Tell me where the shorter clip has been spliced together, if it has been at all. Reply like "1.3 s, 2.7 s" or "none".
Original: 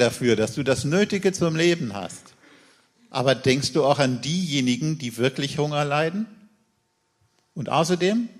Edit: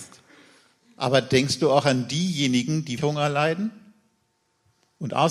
3.0 s